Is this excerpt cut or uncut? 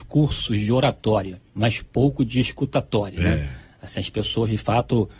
cut